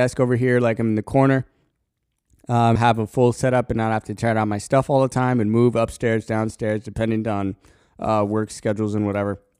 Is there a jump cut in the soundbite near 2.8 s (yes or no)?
yes